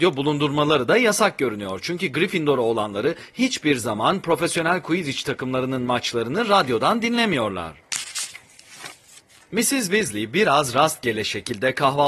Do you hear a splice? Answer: no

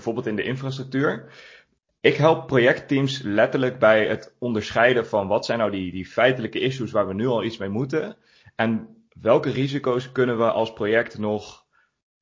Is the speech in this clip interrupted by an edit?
no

